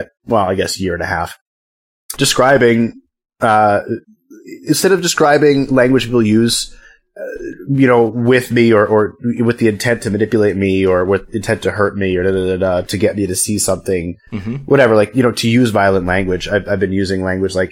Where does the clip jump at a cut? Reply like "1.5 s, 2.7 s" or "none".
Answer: 2.2 s